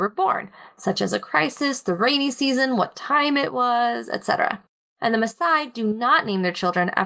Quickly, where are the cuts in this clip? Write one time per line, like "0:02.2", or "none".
none